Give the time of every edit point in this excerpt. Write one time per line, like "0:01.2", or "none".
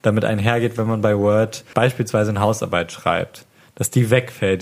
0:01.7